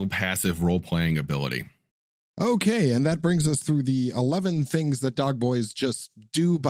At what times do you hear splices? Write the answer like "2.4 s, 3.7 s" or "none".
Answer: none